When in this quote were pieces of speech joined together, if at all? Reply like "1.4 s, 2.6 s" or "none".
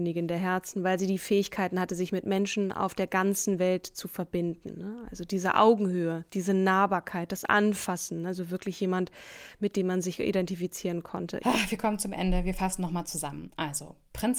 11.4 s